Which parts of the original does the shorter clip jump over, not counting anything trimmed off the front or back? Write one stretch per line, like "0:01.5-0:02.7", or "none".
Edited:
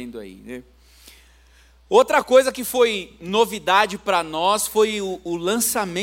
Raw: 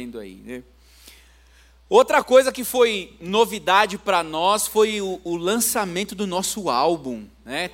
none